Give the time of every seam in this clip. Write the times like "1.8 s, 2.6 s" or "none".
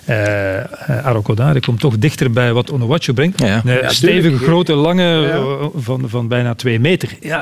3.3 s